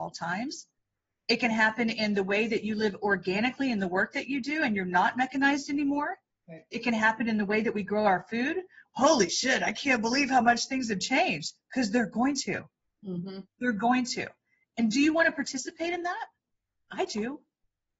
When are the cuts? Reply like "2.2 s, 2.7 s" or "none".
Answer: 8.9 s